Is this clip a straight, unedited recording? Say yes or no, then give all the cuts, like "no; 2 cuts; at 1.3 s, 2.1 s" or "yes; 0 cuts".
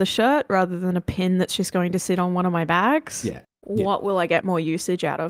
no; 1 cut; at 3.4 s